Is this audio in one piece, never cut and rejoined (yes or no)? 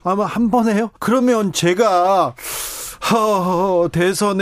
no